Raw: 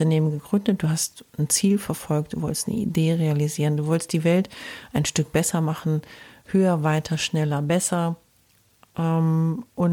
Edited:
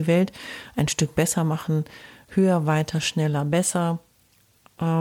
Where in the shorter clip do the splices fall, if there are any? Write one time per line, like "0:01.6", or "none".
none